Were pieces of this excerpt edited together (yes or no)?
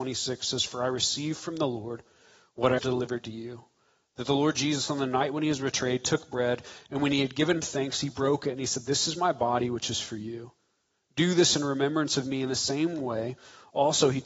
yes